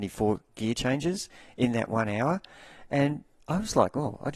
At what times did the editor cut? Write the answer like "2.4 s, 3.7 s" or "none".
none